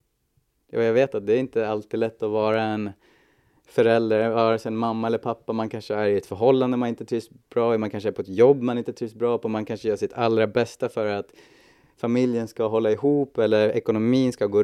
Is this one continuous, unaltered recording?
yes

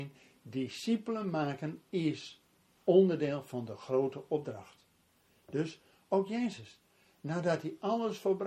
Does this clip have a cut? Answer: no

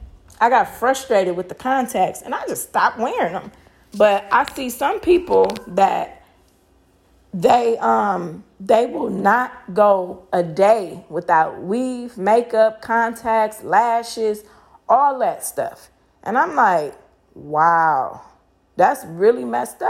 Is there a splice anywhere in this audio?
no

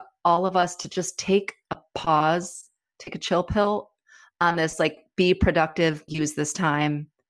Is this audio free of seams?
no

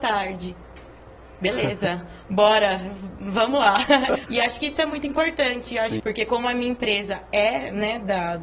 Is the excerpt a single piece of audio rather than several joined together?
no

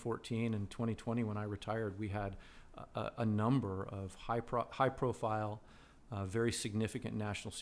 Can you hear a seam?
no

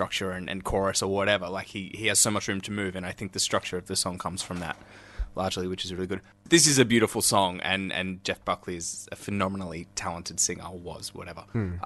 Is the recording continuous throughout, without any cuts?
yes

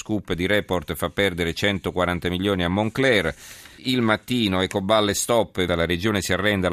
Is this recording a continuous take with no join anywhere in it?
no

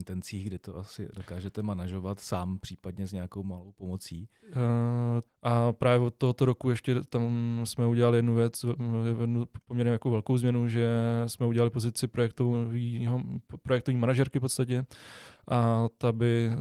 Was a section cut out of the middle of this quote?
yes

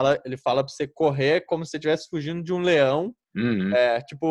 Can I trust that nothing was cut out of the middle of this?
no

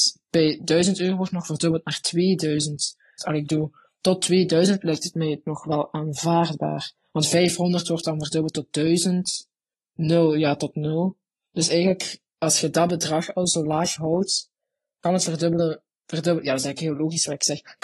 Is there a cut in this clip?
yes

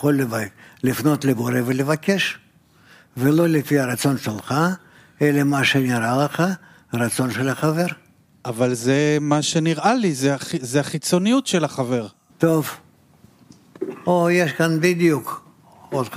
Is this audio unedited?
no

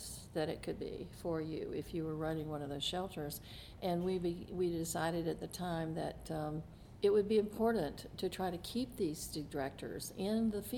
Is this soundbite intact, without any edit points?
yes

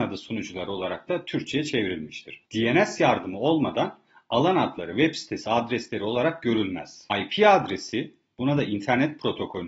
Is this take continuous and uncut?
no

